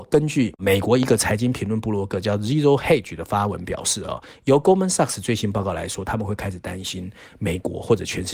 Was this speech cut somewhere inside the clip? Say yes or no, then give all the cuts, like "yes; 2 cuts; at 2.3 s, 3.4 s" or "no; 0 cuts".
no; 0 cuts